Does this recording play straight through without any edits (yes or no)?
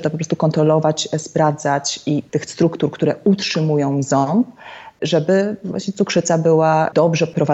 no